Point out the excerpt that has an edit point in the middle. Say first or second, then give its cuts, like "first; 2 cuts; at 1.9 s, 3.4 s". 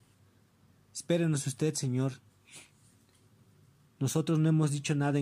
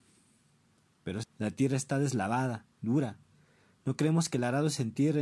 second; 1 cut; at 1.2 s